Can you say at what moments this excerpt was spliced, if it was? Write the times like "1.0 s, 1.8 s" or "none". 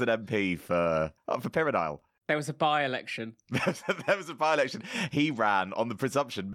none

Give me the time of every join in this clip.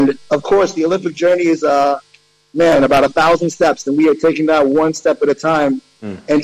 3.8 s

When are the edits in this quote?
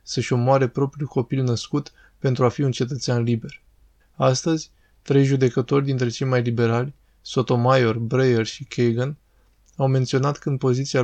4.0 s

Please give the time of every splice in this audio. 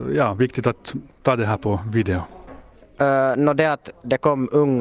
2.8 s

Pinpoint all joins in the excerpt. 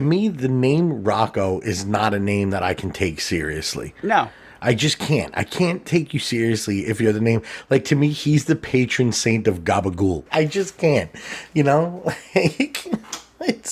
10.3 s

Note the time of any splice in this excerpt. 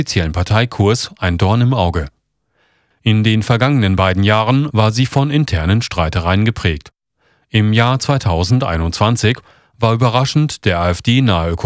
2.9 s

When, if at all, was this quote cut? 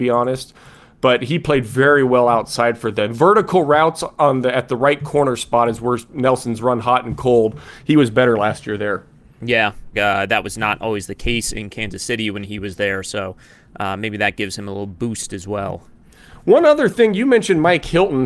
9.9 s

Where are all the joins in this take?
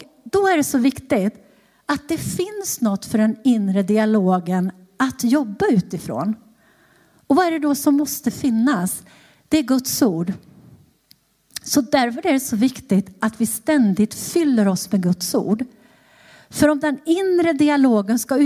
none

